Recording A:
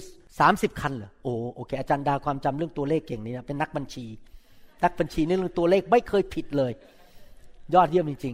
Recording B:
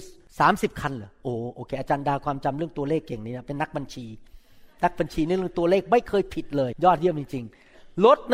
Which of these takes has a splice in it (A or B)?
B